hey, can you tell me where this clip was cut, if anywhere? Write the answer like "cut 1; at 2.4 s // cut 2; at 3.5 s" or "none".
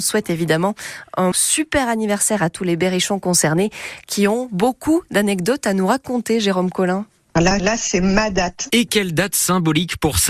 cut 1; at 1.3 s // cut 2; at 7.6 s